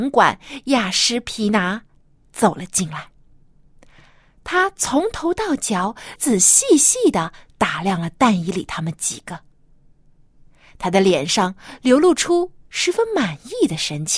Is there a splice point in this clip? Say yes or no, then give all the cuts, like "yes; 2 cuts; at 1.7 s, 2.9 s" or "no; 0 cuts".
yes; 1 cut; at 6.2 s